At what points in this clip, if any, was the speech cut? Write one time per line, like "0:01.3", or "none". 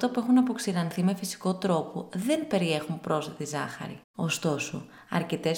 none